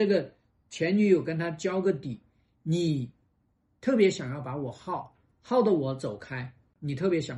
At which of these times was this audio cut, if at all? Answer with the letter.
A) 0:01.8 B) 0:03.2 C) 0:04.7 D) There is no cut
D